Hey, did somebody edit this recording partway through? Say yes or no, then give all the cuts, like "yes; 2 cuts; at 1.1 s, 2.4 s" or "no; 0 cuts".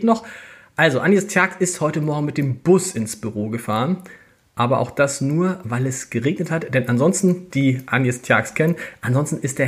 yes; 1 cut; at 7.5 s